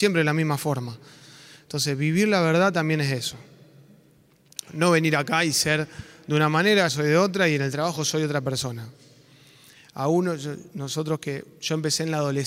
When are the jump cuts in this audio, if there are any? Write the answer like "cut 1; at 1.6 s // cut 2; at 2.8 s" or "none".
cut 1; at 6.9 s